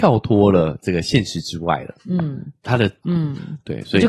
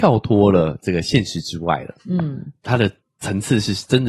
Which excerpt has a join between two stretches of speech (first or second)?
first